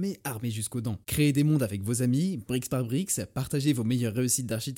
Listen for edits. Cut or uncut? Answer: cut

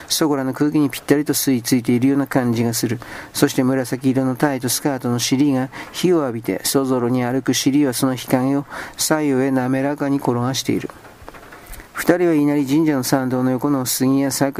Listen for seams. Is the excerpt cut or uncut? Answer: uncut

